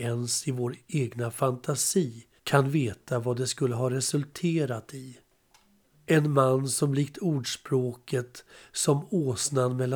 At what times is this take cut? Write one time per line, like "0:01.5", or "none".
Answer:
0:02.4
0:05.9